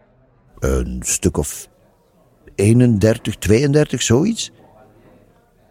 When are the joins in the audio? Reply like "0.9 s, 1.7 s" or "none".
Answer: none